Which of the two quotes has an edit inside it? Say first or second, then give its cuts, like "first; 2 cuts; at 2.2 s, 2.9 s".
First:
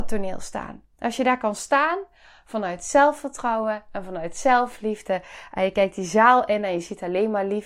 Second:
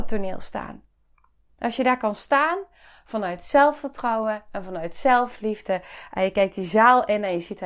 first; 1 cut; at 0.9 s